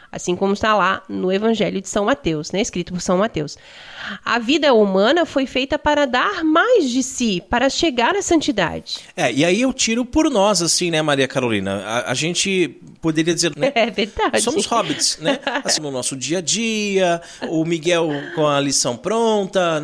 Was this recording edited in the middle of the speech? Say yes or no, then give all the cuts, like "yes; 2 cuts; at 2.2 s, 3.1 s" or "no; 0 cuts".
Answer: yes; 3 cuts; at 13.5 s, 15.8 s, 17.4 s